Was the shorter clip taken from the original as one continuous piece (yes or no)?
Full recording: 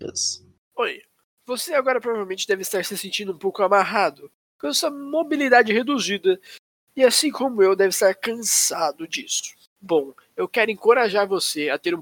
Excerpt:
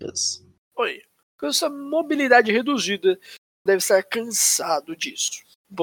no